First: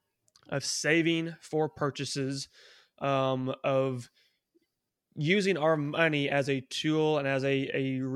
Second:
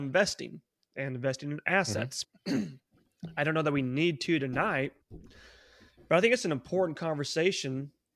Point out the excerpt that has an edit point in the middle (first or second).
second